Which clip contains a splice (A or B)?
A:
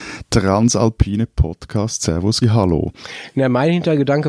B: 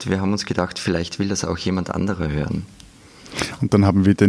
A